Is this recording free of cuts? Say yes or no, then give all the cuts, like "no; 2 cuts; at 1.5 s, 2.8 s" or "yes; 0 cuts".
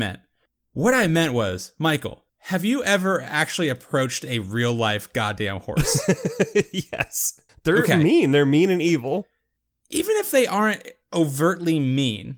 yes; 0 cuts